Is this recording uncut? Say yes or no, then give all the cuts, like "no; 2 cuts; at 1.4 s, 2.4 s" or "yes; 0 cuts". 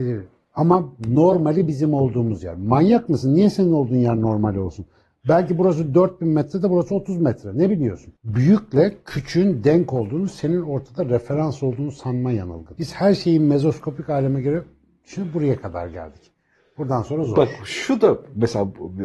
yes; 0 cuts